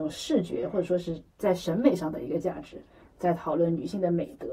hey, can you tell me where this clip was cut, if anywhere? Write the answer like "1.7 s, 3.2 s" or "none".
3.1 s